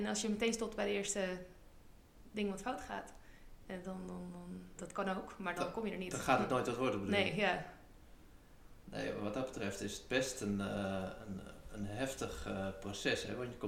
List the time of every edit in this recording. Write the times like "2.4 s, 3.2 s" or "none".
4.8 s